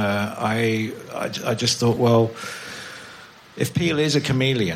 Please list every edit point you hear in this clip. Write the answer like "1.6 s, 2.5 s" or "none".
none

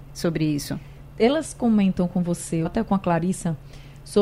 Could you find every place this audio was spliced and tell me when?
2.6 s

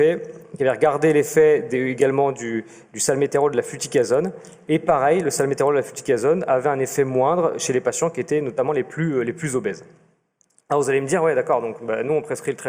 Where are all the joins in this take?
none

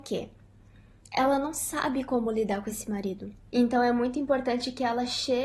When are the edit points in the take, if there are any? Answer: 3.5 s

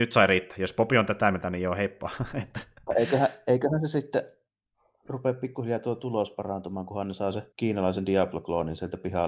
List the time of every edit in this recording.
7.5 s

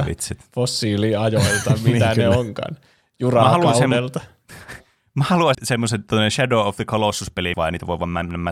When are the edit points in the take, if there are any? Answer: 5.5 s, 7.5 s

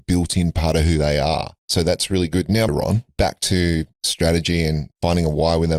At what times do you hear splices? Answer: 2.7 s

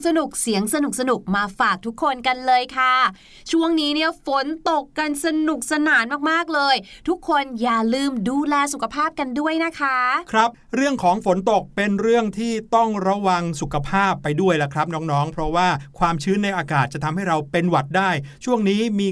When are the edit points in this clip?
none

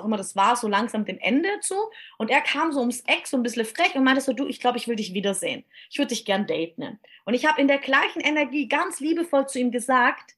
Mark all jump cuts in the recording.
none

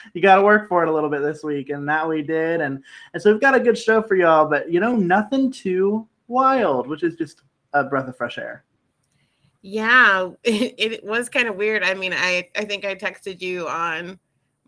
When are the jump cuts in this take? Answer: none

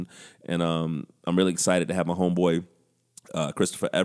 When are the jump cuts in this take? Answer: none

